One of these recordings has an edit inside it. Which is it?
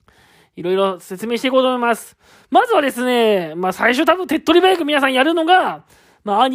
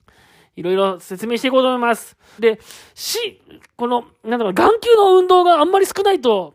second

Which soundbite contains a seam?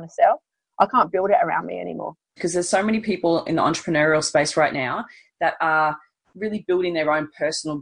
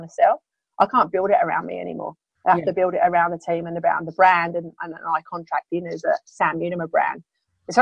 first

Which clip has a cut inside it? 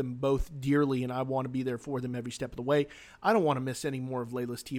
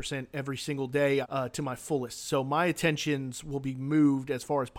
second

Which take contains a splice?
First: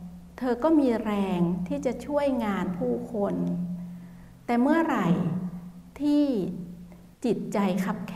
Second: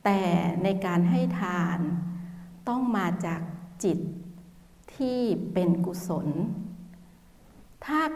first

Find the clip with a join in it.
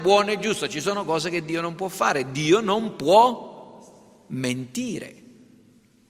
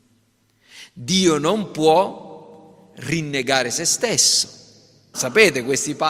second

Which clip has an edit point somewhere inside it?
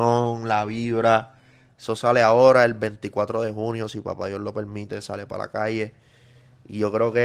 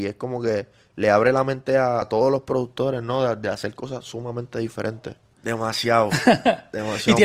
second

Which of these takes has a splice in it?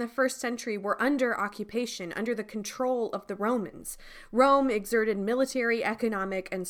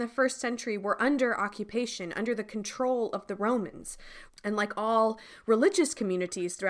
second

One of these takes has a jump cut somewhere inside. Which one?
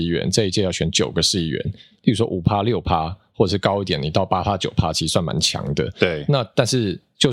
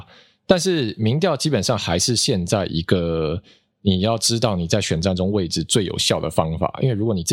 first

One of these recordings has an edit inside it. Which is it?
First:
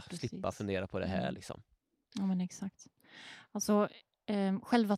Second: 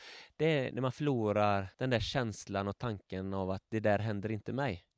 second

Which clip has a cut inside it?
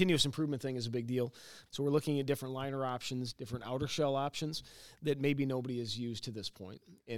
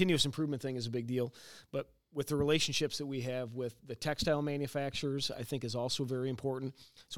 first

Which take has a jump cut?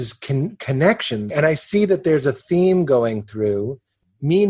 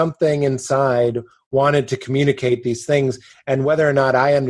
first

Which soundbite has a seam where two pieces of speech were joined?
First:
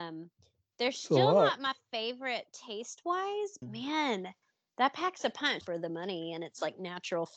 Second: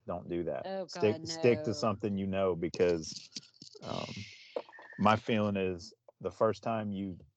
first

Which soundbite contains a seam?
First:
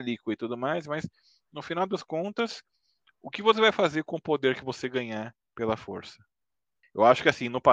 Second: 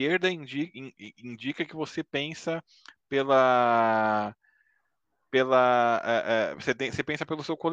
first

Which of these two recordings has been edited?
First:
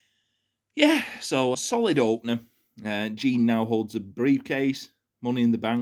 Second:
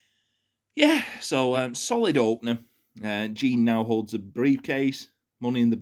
first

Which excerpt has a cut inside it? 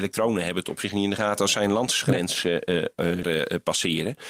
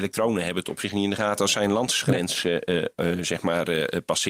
first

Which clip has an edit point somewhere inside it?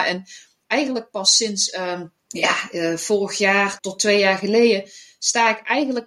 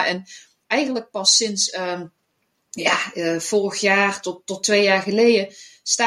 first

